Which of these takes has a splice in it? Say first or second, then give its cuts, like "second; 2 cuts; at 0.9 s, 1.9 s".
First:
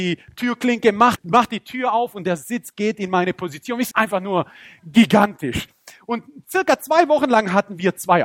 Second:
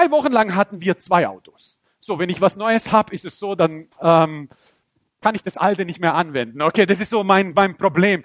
first; 2 cuts; at 1.2 s, 3.9 s